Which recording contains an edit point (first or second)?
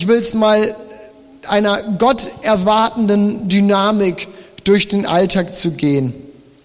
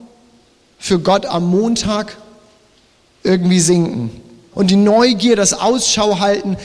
second